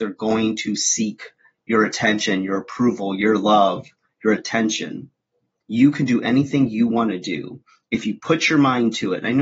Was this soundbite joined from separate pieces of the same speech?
yes; 1 cut; at 5.6 s

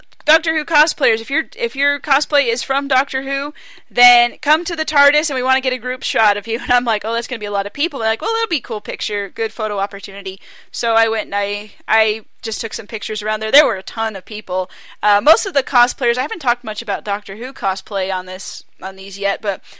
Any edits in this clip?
no; 0 cuts

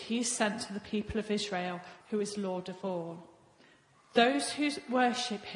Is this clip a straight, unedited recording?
no; 2 cuts; at 2.0 s, 3.9 s

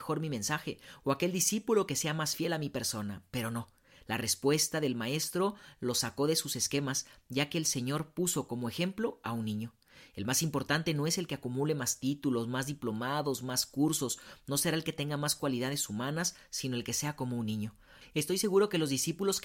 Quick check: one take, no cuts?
yes; 0 cuts

